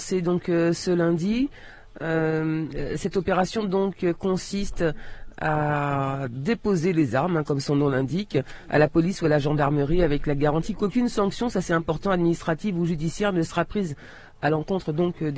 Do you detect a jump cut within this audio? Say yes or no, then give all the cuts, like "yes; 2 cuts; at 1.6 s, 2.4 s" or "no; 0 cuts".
no; 0 cuts